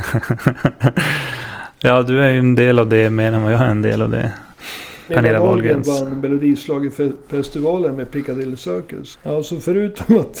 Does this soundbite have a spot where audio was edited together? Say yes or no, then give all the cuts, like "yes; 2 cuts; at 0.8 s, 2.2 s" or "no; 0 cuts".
yes; 2 cuts; at 5.1 s, 9.1 s